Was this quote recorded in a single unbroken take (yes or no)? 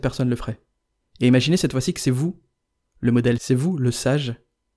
no